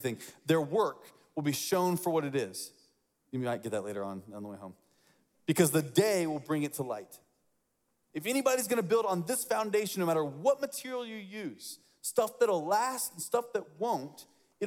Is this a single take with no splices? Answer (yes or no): yes